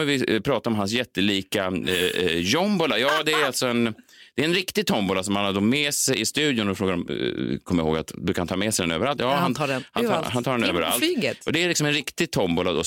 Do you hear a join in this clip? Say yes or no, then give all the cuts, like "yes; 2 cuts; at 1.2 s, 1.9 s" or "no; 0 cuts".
no; 0 cuts